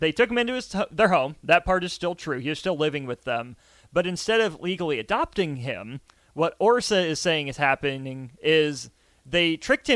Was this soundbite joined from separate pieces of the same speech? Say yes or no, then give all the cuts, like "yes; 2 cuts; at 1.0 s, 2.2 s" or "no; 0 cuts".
no; 0 cuts